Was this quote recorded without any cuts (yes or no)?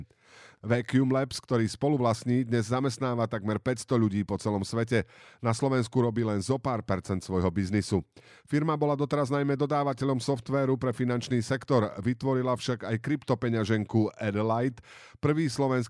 yes